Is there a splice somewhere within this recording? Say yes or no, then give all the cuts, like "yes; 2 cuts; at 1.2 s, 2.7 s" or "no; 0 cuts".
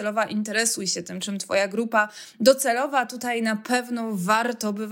no; 0 cuts